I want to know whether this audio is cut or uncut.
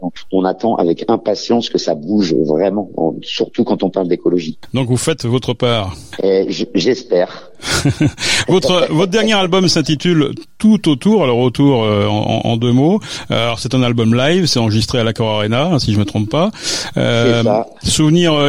uncut